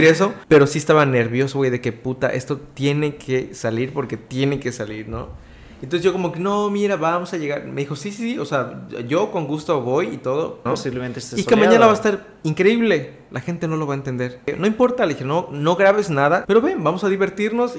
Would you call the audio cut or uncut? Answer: cut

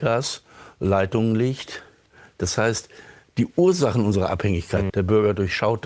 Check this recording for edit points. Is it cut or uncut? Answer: cut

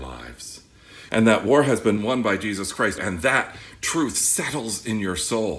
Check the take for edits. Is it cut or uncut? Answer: cut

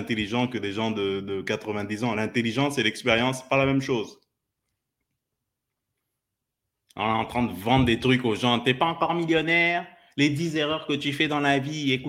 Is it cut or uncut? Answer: uncut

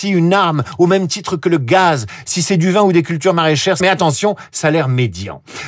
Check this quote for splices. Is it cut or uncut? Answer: cut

